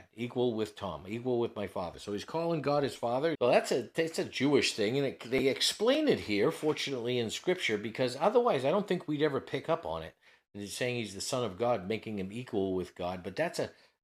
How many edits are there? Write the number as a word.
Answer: one